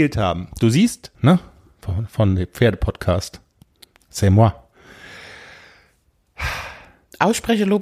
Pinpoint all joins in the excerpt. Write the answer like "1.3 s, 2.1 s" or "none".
1.1 s